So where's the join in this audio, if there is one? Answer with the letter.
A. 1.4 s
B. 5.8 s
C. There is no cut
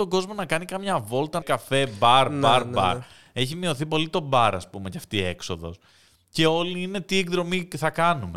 A